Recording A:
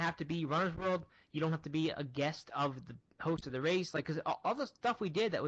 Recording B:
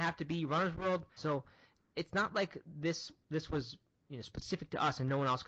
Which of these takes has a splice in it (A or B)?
B